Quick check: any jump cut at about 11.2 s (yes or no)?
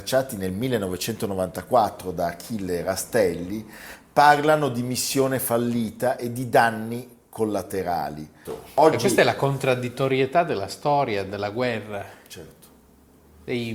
no